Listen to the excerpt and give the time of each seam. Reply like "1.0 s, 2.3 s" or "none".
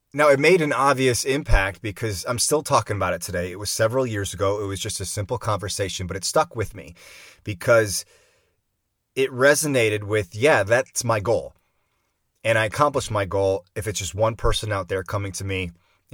none